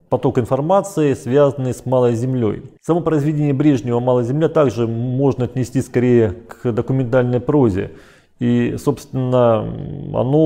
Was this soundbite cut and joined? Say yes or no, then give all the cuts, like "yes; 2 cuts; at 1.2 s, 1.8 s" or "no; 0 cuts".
no; 0 cuts